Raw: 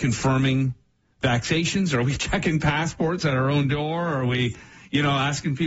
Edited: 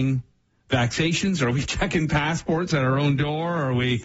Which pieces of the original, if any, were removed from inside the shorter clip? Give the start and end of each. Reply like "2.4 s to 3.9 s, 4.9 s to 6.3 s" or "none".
none